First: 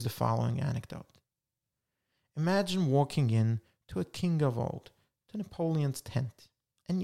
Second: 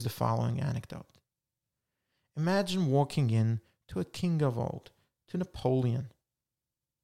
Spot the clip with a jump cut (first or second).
first